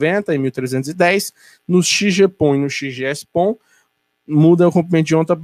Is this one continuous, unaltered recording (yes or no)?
yes